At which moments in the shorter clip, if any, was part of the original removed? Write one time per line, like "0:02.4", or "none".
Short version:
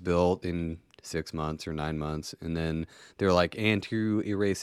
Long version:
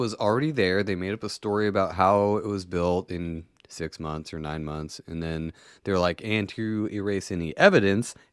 none